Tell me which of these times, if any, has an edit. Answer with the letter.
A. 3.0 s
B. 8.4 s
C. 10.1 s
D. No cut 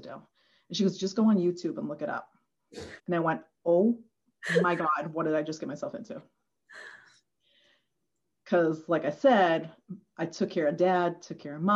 A